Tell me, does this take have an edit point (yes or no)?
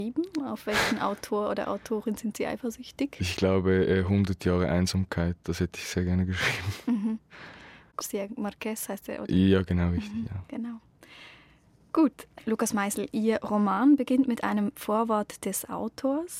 no